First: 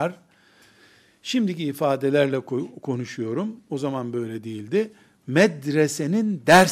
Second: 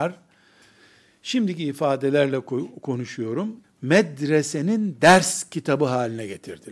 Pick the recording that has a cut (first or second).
second